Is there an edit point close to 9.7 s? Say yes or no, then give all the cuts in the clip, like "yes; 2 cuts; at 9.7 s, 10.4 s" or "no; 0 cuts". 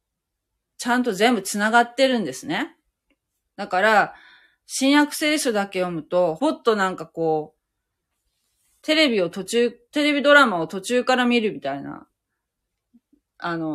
no; 2 cuts; at 3.4 s, 6.4 s